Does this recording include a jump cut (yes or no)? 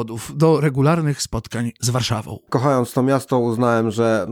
yes